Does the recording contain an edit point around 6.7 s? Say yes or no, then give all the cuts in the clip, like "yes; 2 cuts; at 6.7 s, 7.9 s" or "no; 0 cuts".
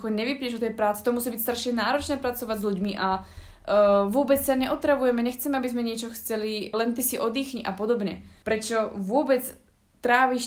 yes; 2 cuts; at 6.7 s, 8.4 s